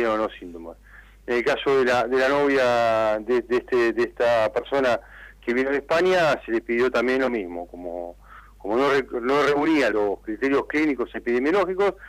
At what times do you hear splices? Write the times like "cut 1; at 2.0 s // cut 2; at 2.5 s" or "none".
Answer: cut 1; at 9.9 s